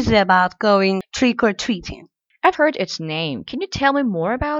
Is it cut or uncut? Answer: cut